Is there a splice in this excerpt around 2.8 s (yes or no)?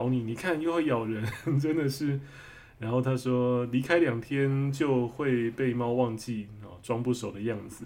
no